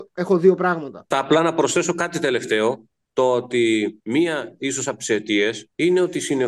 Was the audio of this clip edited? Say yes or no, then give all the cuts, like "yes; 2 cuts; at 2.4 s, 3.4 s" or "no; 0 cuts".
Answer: yes; 1 cut; at 1.1 s